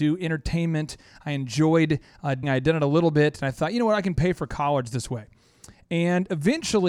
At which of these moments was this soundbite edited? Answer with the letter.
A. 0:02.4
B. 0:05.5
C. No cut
A